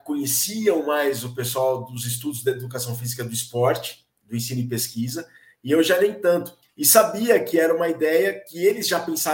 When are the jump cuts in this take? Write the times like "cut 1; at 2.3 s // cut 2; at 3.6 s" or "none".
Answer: cut 1; at 6.6 s